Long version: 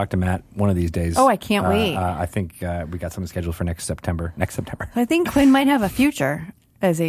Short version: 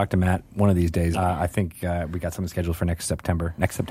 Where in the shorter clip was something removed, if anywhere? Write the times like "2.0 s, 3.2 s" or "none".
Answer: 1.1 s